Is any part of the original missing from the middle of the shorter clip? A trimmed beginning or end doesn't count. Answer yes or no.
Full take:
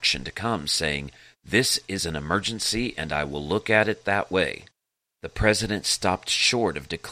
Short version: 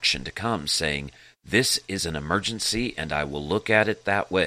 no